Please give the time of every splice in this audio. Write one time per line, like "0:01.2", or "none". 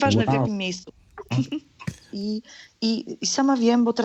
0:02.1